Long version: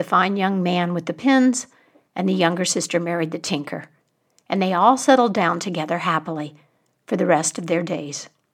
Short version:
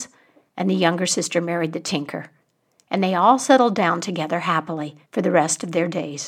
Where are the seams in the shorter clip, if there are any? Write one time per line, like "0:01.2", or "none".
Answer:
0:05.0